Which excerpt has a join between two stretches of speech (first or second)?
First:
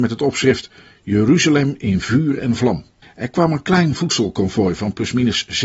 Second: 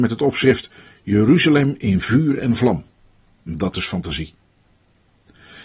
first